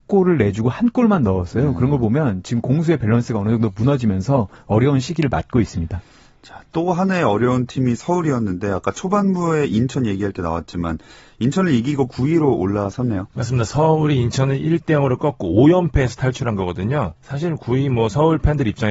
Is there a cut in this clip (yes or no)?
no